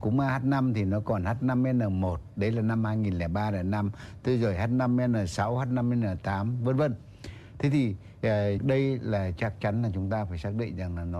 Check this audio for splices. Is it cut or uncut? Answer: cut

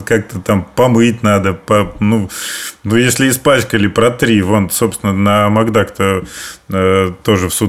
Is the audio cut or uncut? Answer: uncut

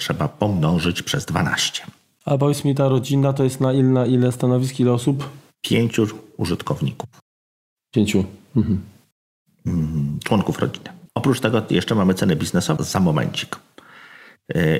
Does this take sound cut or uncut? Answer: cut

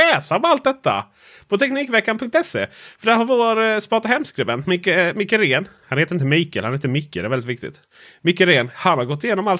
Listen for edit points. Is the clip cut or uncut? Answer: uncut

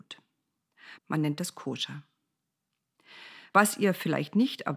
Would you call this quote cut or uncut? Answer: cut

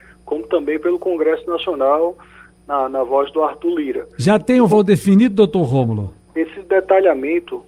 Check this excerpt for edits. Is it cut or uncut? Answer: cut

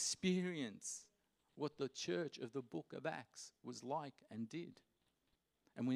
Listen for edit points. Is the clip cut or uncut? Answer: uncut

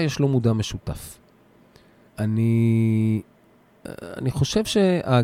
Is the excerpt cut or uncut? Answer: cut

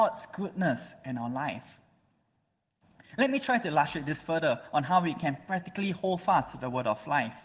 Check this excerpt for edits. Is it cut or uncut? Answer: uncut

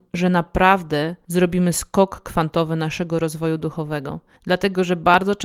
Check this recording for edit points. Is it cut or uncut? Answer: cut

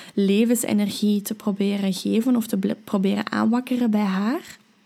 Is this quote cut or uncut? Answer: uncut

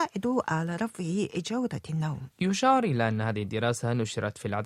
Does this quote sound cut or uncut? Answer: cut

